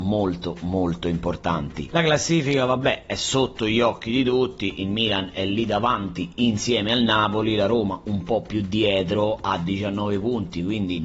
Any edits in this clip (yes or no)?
no